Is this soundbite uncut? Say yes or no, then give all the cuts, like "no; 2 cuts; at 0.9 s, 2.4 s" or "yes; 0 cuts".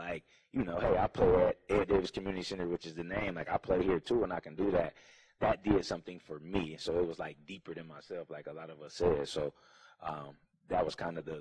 yes; 0 cuts